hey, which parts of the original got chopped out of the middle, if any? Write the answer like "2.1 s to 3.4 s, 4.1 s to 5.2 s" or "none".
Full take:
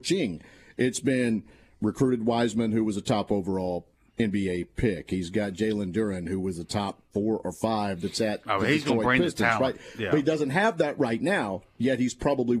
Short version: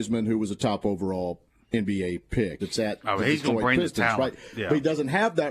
5.1 s to 8.0 s

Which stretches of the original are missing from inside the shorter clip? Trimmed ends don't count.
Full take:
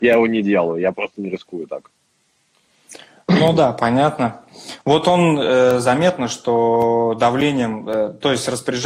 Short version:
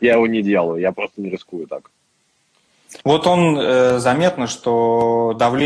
3.0 s to 4.8 s

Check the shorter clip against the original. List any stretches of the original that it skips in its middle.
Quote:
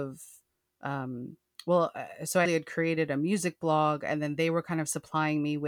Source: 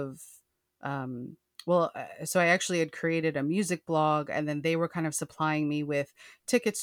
2.4 s to 2.7 s

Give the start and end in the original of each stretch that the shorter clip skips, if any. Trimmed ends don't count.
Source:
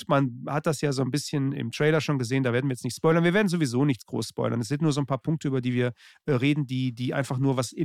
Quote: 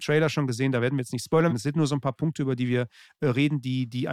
3.2 s to 4.5 s

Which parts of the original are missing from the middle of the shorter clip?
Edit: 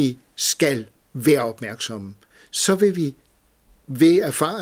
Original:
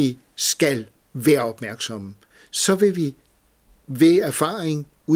none

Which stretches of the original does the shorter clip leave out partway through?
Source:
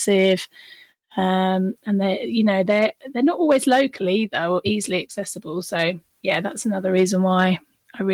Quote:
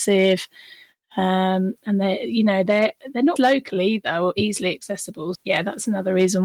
3.4 s to 3.6 s, 5.6 s to 6.1 s

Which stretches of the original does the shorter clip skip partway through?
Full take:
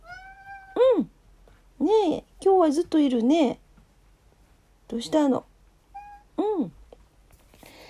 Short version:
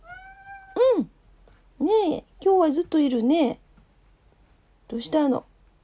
none

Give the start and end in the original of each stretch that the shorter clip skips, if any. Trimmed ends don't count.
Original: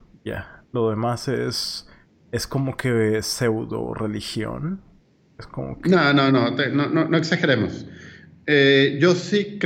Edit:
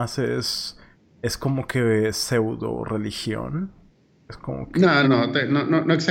6.1 s to 6.3 s

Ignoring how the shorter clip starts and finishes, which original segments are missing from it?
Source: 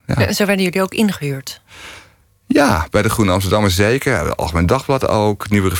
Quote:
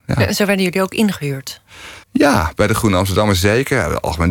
2.0 s to 2.4 s

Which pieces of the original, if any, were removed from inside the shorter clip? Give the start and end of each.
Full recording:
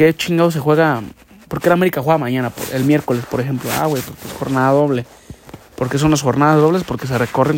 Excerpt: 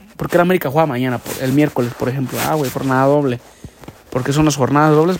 4.0 s to 4.4 s

